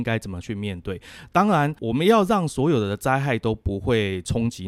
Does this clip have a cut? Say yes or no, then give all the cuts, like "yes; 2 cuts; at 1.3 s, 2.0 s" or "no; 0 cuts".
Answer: no; 0 cuts